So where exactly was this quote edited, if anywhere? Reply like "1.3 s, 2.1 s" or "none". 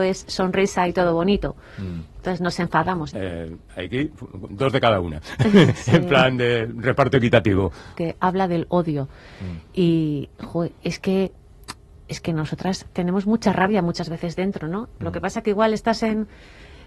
3.1 s, 8.0 s